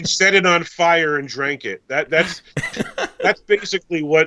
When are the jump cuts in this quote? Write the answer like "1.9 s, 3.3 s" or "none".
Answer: none